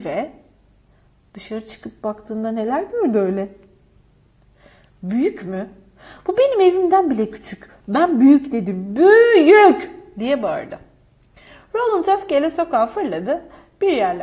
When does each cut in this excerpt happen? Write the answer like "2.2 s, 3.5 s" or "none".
none